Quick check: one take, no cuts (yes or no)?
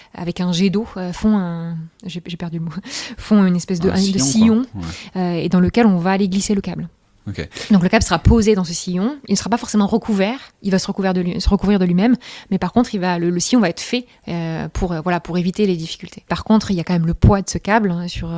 no